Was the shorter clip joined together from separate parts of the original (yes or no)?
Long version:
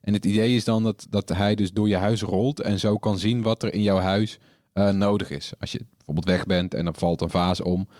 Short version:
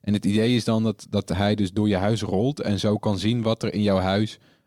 no